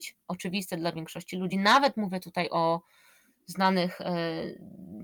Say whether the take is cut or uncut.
uncut